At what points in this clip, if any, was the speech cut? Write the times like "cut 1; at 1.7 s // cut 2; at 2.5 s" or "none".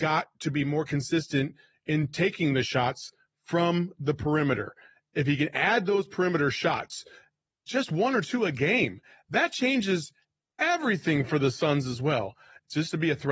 none

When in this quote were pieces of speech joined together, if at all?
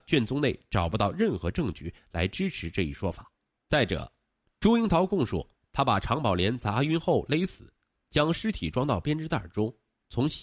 cut 1; at 3.6 s

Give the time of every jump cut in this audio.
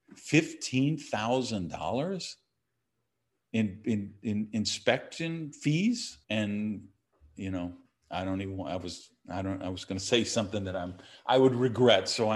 cut 1; at 6.2 s

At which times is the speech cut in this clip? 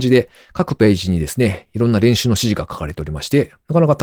none

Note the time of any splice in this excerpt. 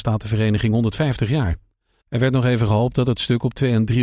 cut 1; at 2.0 s

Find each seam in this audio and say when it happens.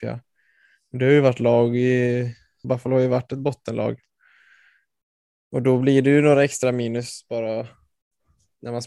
cut 1; at 2.6 s

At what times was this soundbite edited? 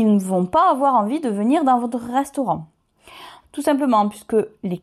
cut 1; at 3.4 s

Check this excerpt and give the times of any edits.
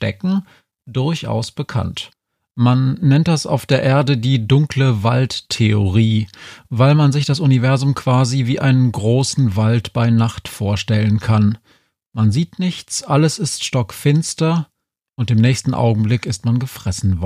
none

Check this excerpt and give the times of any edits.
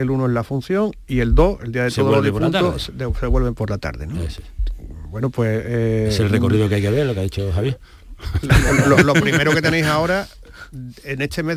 none

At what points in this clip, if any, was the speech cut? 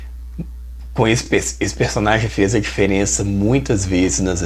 none

